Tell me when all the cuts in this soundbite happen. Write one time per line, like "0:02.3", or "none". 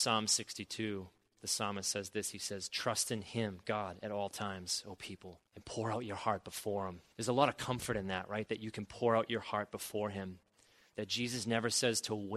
0:05.5
0:07.1